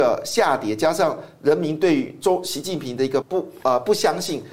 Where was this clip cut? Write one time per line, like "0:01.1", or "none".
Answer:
0:03.2